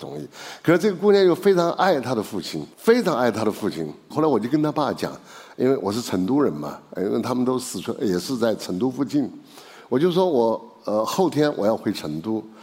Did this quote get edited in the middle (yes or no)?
yes